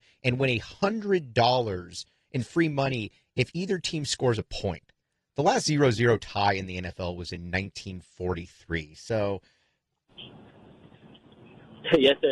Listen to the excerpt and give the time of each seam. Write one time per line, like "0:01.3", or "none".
0:10.1